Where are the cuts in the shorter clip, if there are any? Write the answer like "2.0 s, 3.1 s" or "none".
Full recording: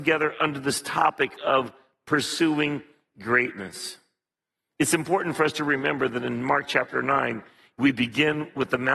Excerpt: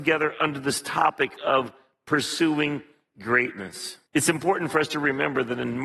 4.1 s